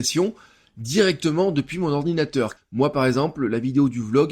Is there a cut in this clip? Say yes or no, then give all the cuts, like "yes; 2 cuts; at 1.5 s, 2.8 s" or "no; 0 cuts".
yes; 1 cut; at 2.6 s